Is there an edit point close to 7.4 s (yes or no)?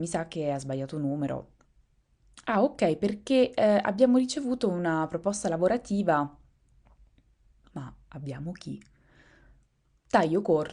no